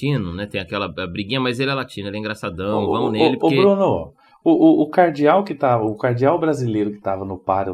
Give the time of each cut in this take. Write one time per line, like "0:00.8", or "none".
none